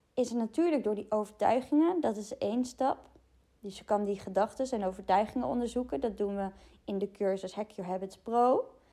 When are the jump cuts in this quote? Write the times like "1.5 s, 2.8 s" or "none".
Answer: none

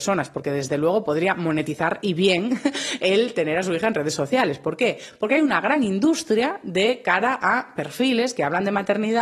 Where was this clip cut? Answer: none

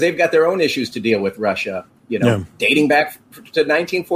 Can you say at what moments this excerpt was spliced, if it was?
none

